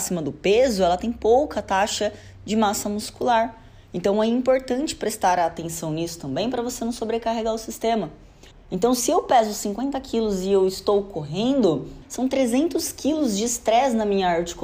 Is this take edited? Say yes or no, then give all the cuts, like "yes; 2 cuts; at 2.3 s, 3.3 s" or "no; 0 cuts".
yes; 2 cuts; at 8.5 s, 12.0 s